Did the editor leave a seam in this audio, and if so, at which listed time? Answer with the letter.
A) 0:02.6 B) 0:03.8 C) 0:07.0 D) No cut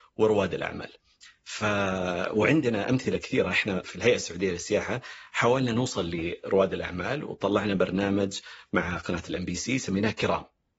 B